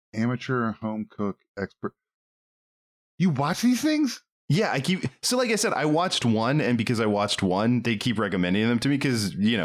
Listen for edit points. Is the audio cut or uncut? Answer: uncut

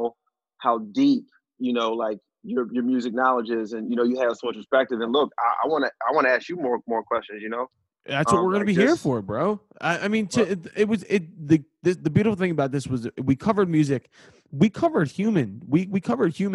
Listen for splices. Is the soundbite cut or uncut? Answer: uncut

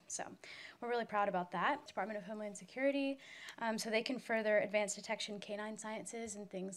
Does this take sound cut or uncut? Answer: cut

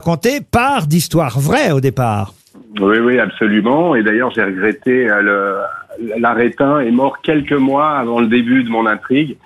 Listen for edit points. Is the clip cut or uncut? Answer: uncut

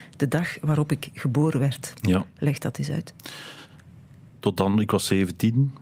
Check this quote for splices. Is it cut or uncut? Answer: uncut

